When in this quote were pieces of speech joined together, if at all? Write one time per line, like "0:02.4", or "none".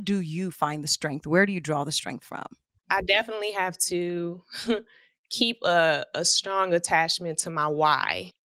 0:02.8